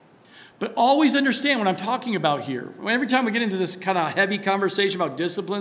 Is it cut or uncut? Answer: uncut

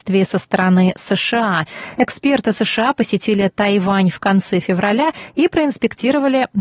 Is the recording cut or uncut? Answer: uncut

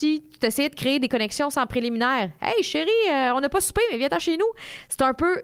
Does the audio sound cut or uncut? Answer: uncut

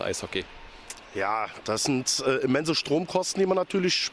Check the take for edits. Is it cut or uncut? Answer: uncut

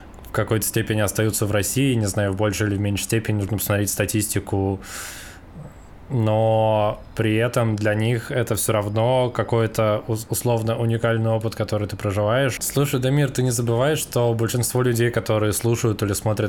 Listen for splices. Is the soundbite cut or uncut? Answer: cut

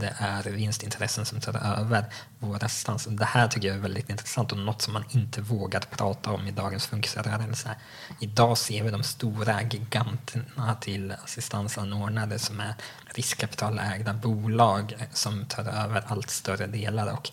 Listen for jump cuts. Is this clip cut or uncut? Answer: cut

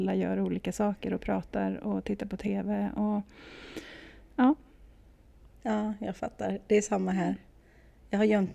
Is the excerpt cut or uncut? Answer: uncut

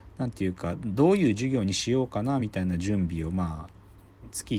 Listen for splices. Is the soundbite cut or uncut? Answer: uncut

